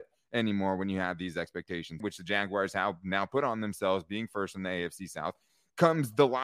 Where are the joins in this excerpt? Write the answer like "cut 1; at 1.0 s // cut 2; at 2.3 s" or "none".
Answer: cut 1; at 2.0 s